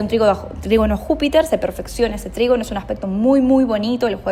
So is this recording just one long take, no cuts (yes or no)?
yes